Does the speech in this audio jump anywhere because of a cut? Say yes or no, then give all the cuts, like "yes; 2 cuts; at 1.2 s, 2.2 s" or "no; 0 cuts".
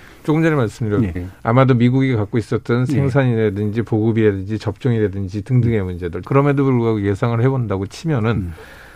yes; 2 cuts; at 1.2 s, 6.2 s